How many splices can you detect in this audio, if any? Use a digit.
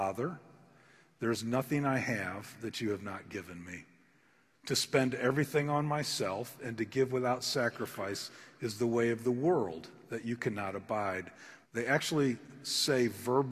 2